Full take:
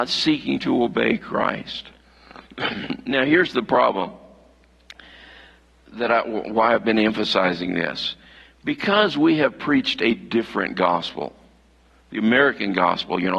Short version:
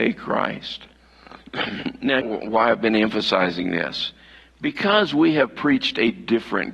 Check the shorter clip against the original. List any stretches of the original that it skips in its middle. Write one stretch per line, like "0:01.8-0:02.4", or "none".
0:03.3-0:06.2

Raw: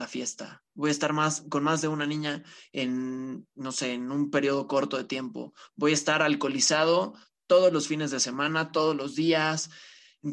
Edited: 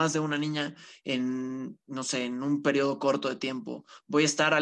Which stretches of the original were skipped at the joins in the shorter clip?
none

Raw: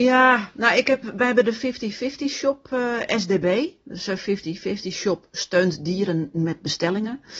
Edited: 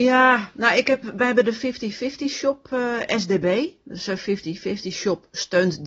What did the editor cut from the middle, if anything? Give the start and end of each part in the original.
none

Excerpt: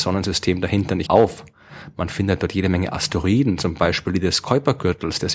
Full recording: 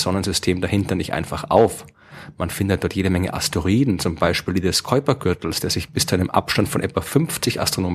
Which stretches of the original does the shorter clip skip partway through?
0:01.1-0:01.5

